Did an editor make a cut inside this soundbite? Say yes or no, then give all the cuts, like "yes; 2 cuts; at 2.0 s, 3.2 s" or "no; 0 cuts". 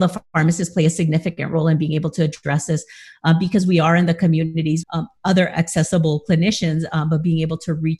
yes; 1 cut; at 4.8 s